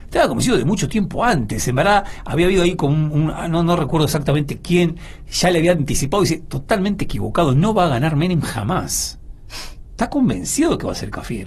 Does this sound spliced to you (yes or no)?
no